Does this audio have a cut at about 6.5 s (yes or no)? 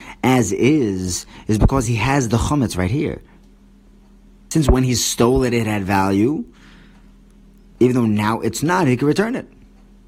no